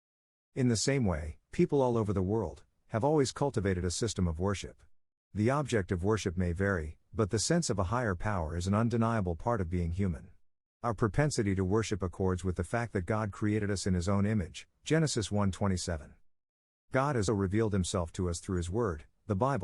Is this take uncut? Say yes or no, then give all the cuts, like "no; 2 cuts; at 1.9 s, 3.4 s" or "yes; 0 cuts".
no; 2 cuts; at 2.8 s, 17.3 s